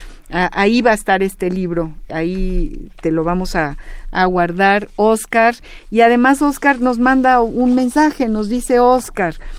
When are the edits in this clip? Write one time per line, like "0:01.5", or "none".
0:02.1